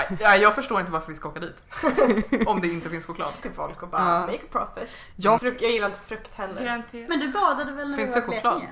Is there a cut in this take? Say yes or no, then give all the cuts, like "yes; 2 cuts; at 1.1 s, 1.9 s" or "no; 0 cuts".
yes; 2 cuts; at 3.4 s, 5.4 s